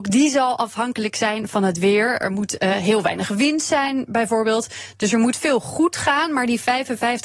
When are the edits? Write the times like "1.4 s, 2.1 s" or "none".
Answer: none

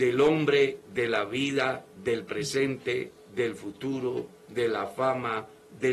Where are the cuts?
none

